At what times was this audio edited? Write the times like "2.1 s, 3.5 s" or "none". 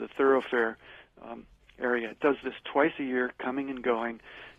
none